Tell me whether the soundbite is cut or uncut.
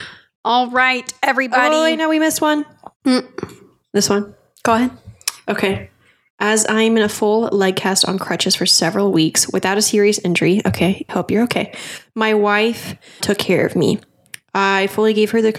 cut